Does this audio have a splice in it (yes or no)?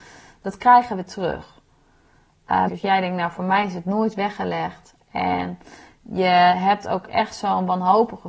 yes